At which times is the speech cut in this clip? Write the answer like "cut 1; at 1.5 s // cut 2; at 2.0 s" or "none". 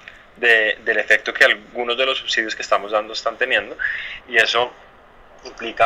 cut 1; at 4.2 s